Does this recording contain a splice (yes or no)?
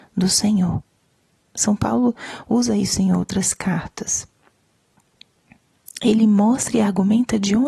yes